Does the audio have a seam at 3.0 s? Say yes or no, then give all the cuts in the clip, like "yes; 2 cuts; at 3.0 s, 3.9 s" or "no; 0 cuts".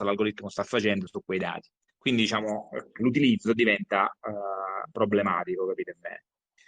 yes; 2 cuts; at 1.9 s, 3.0 s